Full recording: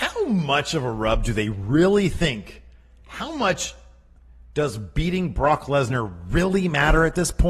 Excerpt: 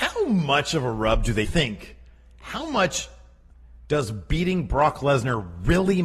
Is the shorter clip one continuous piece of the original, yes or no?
no